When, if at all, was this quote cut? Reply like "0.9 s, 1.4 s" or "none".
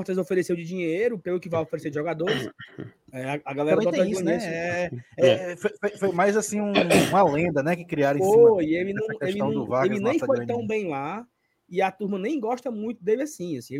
3.0 s

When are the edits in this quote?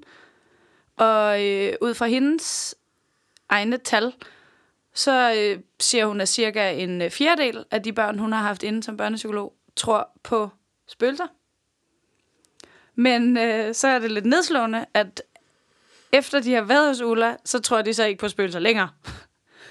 none

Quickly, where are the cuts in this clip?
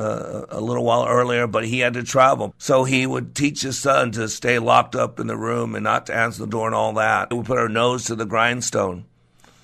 2.5 s, 7.3 s

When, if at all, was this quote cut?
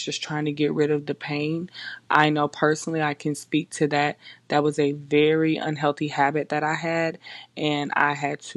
none

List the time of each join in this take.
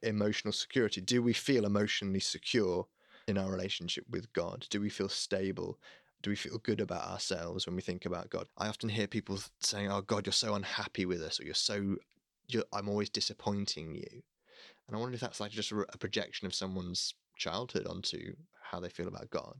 none

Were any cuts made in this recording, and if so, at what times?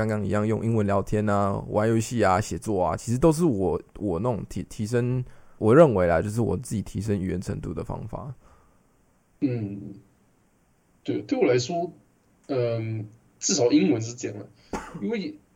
5.6 s, 12.4 s

